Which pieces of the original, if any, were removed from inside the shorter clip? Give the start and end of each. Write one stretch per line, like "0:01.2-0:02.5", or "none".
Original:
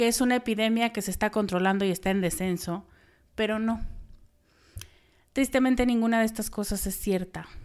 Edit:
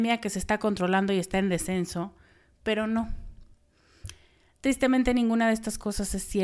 none